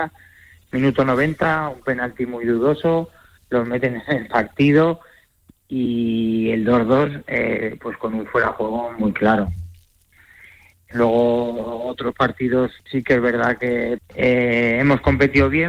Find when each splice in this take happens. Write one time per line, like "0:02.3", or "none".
0:10.9
0:12.8
0:14.0

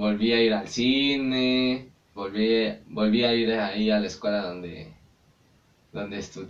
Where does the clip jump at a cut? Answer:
0:02.2

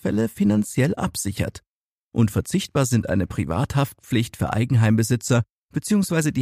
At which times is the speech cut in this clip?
none

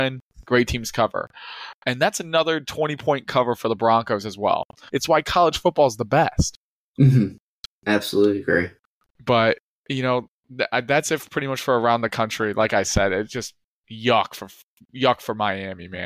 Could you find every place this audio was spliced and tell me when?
0:04.9

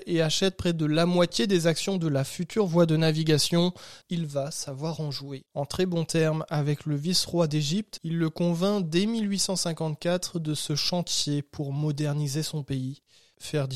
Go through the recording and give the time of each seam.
0:04.0
0:05.5
0:08.0

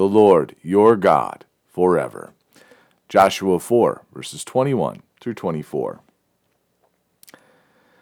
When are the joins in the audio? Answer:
none

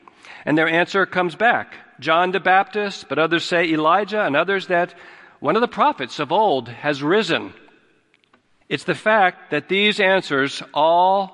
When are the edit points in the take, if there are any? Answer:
0:08.6

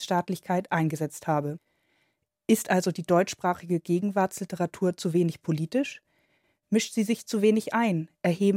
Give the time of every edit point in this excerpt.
none

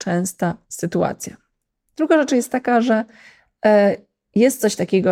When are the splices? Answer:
0:01.9

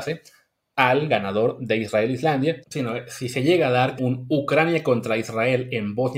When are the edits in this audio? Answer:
0:02.6
0:04.0

